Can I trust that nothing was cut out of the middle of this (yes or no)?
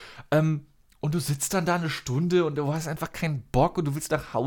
yes